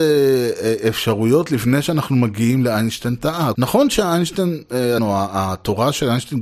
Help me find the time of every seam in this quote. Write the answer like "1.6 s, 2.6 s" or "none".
3.5 s, 5.0 s